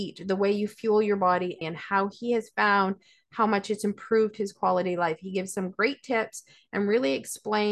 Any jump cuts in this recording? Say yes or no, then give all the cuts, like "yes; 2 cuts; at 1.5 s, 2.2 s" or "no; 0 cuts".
yes; 1 cut; at 1.6 s